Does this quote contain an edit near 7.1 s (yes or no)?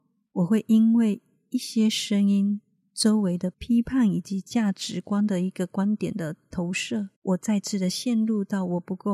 yes